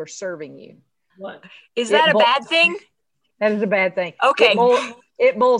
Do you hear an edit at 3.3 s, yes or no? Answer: no